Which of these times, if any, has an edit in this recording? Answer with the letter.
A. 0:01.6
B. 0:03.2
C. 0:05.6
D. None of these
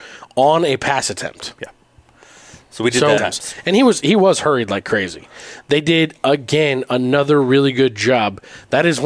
B